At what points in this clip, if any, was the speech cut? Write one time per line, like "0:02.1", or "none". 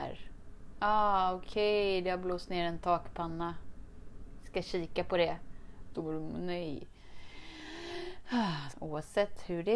0:05.9
0:08.7